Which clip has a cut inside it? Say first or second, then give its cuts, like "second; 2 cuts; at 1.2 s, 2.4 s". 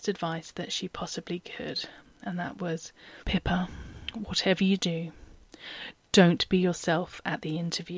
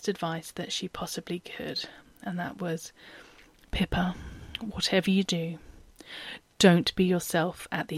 first; 1 cut; at 3.2 s